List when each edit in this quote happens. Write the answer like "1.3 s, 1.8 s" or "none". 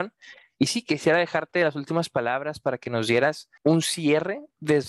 3.6 s

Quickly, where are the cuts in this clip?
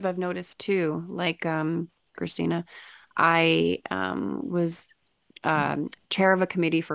2.2 s

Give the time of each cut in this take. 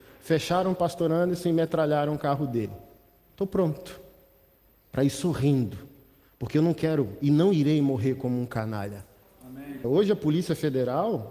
9.8 s

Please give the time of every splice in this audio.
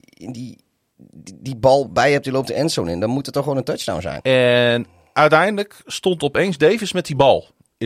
4.2 s

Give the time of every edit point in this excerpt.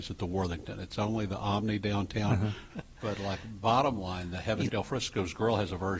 2.7 s, 4.7 s

